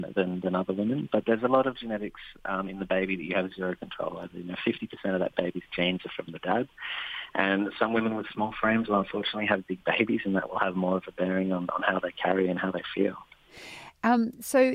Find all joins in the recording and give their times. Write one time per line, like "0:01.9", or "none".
none